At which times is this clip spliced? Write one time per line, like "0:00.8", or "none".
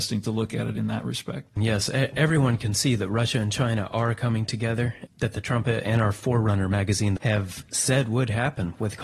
0:01.6
0:05.1
0:07.2